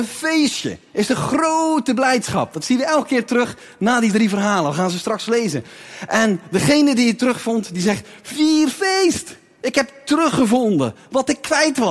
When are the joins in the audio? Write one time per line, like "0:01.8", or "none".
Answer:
none

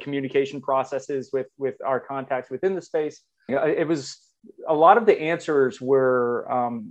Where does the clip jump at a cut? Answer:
0:03.5

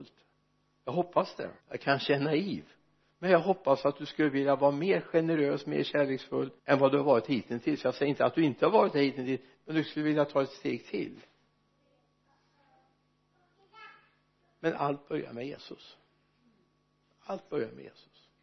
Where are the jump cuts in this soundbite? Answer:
0:01.6
0:06.6

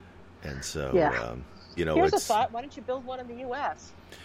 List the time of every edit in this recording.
0:01.8

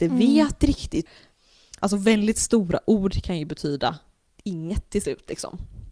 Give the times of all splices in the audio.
0:01.8

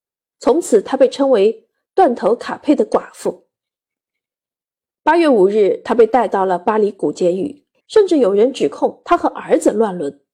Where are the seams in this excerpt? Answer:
0:07.8

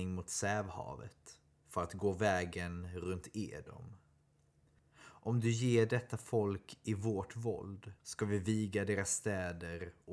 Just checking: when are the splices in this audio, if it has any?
0:04.8
0:08.0

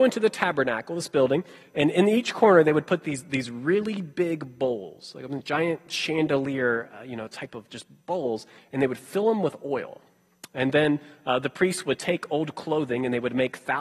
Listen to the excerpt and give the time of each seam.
none

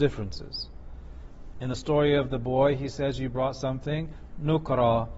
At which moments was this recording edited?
0:01.5

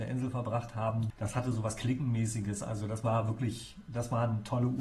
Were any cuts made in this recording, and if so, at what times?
0:01.1

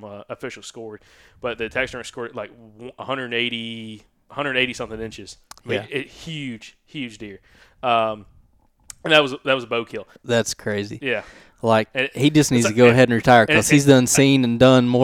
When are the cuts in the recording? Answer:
0:10.2

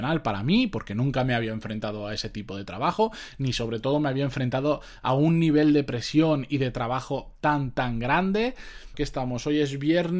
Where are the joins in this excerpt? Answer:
0:08.9

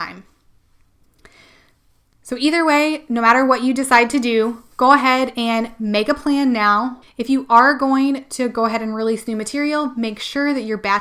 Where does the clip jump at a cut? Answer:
0:07.0

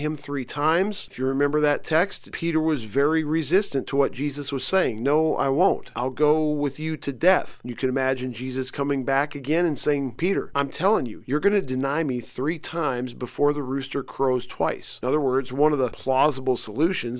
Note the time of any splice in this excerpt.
none

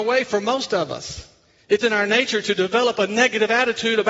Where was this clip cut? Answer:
0:01.8

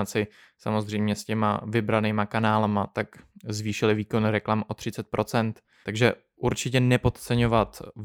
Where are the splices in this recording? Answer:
0:05.8

